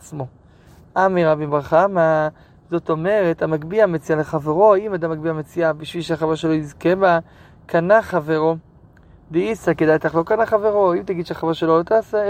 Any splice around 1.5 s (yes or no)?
yes